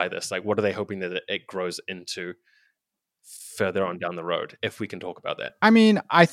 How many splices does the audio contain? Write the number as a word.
zero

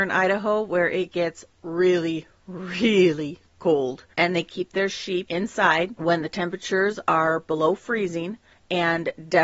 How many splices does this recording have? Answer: one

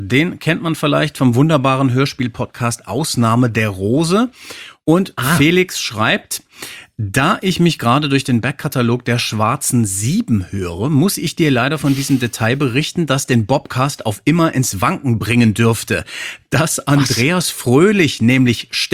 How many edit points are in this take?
zero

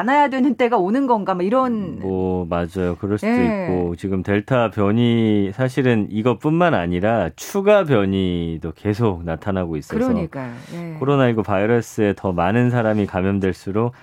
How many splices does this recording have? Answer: zero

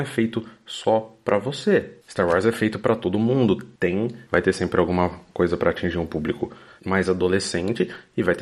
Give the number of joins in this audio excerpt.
two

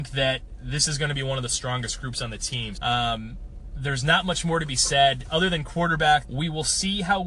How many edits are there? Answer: two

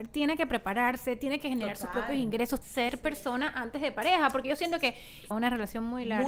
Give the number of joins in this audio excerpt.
two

